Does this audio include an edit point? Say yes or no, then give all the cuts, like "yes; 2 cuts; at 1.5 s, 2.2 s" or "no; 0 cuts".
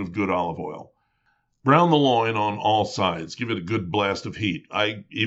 no; 0 cuts